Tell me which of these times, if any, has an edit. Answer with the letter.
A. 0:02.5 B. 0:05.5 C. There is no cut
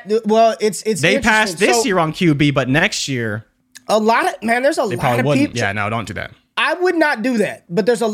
B